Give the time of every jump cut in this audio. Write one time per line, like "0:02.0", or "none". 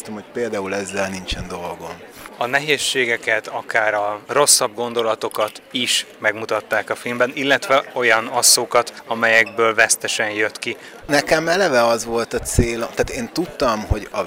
0:11.0